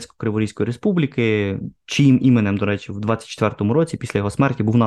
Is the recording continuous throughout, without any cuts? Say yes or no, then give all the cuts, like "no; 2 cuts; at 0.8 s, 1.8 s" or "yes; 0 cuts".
yes; 0 cuts